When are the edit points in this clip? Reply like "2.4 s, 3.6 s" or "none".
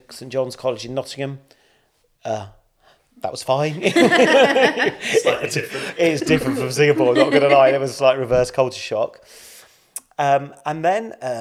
none